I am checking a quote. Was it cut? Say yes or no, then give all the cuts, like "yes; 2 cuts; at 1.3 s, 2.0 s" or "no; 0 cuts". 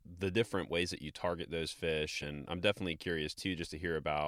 no; 0 cuts